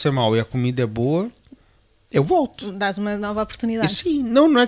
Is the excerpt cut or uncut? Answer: uncut